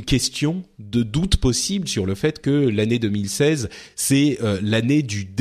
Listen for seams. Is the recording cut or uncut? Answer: uncut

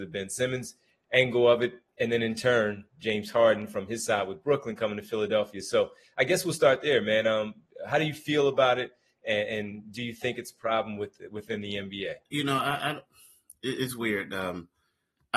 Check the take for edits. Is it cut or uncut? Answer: cut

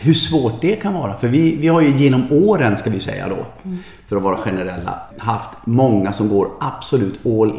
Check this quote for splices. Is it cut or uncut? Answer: cut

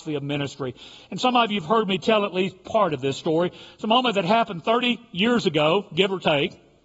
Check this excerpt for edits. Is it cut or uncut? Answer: uncut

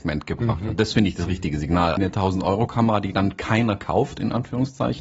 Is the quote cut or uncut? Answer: cut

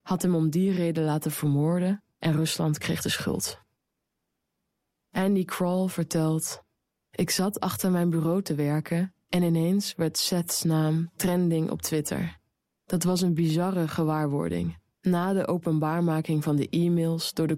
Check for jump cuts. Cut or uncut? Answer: cut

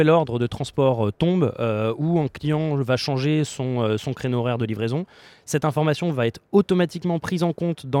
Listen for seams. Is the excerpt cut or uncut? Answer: uncut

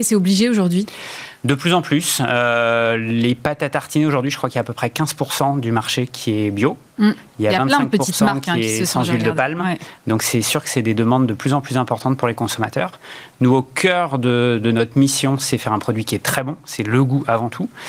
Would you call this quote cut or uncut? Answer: uncut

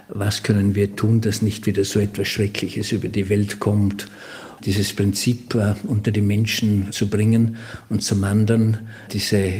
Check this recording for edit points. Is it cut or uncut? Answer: cut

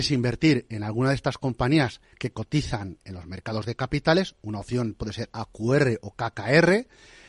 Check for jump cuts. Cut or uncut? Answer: uncut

